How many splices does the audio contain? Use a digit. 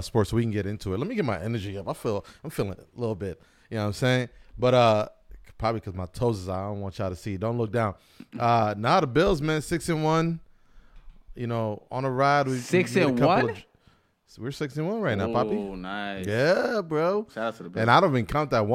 0